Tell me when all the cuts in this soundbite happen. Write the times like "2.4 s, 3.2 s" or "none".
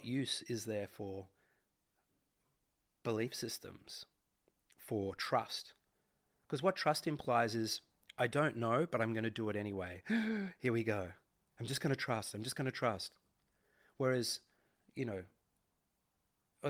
none